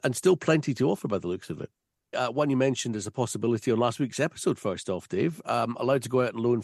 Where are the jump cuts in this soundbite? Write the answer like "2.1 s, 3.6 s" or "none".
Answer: 2.1 s